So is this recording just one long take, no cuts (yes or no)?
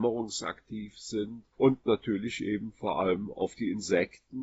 no